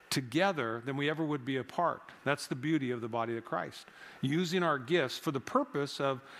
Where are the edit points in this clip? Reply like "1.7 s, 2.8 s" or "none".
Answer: none

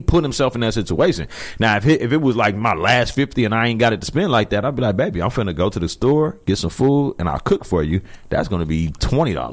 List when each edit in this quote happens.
none

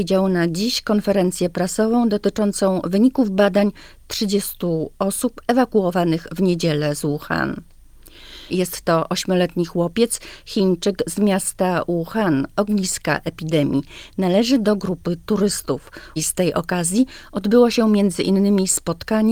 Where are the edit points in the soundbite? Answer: 8.5 s, 16.2 s

